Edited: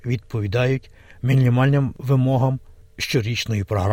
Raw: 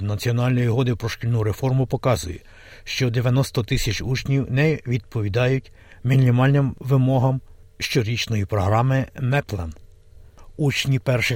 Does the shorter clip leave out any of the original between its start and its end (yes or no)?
no